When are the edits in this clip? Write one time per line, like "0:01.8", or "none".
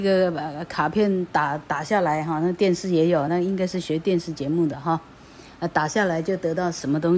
none